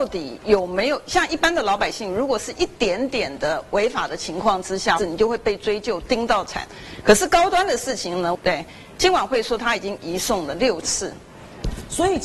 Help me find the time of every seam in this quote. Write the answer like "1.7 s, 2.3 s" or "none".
5.0 s, 8.3 s

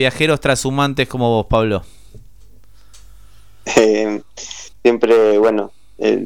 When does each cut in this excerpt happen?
4.7 s

